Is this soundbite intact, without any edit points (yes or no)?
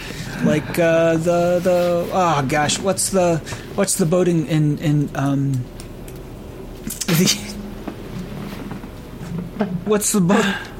no